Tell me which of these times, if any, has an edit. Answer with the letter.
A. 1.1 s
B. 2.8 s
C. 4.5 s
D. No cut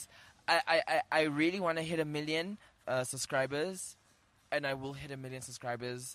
B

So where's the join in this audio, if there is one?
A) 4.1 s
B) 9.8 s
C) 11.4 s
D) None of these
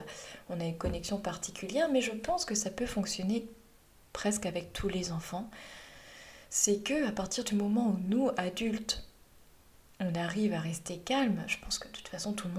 D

